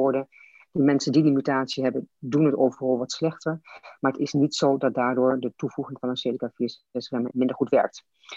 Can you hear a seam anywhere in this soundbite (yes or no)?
yes